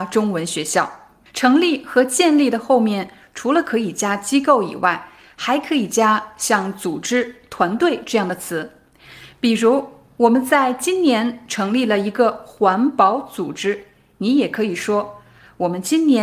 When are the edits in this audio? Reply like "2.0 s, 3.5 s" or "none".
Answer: 1.3 s